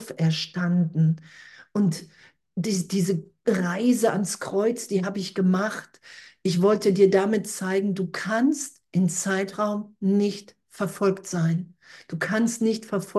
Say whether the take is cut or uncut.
uncut